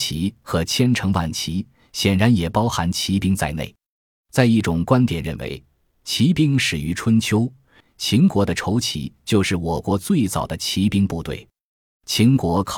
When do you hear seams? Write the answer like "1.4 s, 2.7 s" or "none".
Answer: 7.8 s